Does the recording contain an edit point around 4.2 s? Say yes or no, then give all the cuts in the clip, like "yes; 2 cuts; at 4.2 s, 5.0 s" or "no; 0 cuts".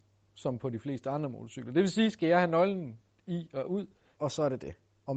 yes; 1 cut; at 4.2 s